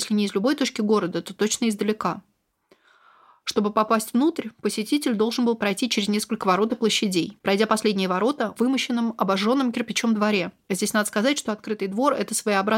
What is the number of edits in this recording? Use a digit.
1